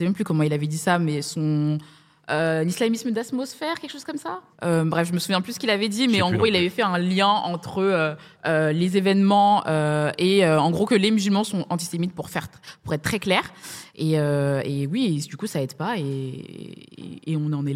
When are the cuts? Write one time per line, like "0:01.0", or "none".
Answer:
0:04.5

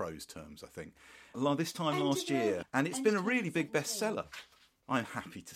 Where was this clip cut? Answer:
0:01.3
0:02.6

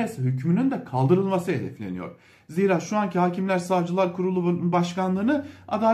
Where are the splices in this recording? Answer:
none

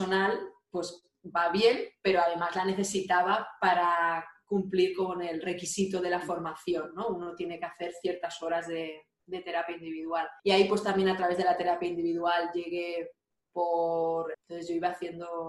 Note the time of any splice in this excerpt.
0:10.4
0:14.3

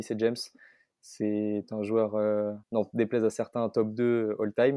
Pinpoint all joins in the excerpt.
0:02.6

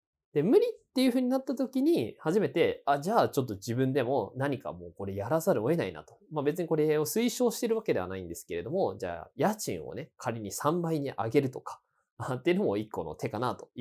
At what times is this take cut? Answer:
0:06.2

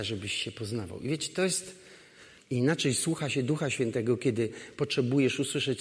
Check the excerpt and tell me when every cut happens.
0:02.4

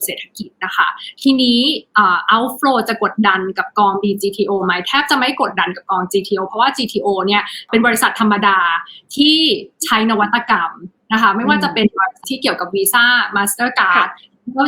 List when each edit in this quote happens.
0:12.2

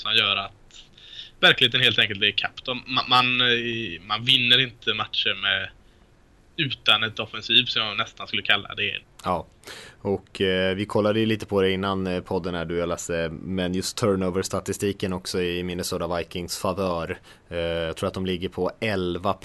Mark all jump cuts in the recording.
0:09.0

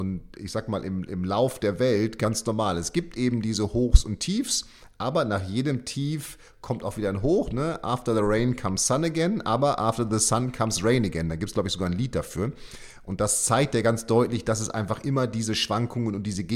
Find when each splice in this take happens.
none

